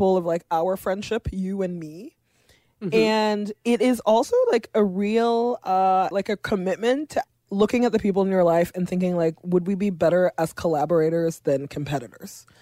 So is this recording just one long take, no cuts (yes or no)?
no